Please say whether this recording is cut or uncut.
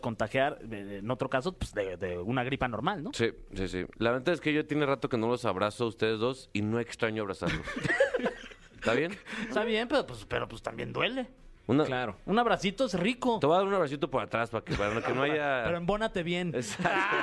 cut